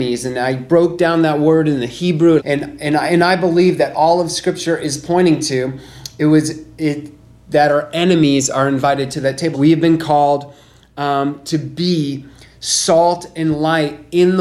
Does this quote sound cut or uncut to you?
cut